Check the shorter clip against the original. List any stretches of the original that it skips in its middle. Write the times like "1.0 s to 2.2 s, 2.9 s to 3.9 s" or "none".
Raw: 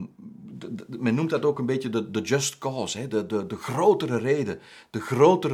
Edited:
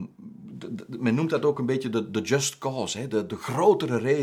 3.3 s to 3.5 s